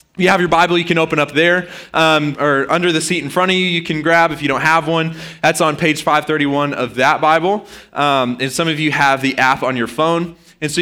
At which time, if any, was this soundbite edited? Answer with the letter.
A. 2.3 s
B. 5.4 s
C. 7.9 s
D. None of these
A